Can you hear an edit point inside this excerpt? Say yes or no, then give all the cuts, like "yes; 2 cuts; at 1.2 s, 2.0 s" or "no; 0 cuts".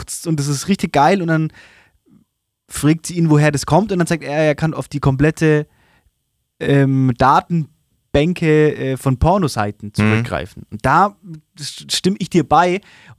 no; 0 cuts